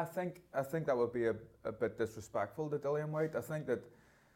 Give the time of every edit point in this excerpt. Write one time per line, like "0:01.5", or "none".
none